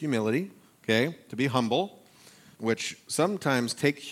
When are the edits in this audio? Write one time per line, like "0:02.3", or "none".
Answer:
0:02.5